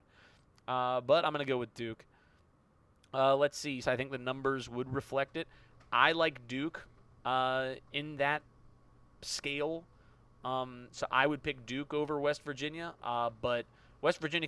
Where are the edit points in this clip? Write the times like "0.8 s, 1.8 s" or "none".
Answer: 3.8 s